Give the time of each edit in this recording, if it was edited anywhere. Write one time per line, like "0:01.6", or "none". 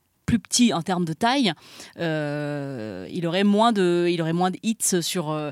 none